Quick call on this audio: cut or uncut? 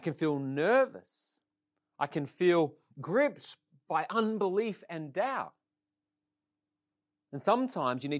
uncut